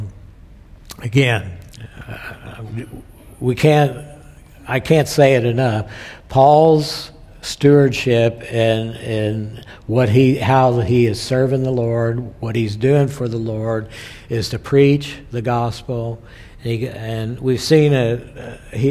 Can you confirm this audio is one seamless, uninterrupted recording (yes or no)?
yes